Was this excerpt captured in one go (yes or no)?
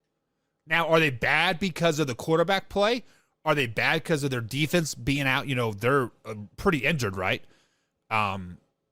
yes